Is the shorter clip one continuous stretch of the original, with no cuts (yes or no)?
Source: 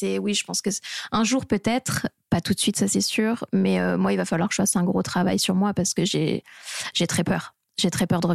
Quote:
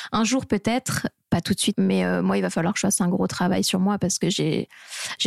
no